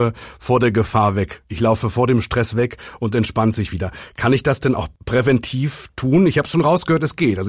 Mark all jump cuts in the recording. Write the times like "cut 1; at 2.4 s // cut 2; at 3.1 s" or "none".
none